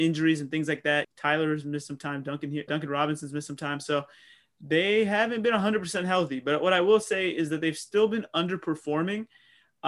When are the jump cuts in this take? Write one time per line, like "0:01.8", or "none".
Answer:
0:01.0
0:02.7